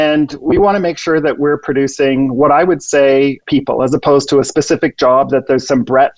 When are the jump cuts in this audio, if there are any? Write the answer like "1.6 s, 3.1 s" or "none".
3.4 s